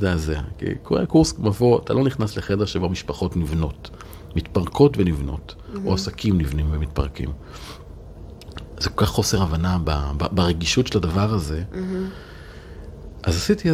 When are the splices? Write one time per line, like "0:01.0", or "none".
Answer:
none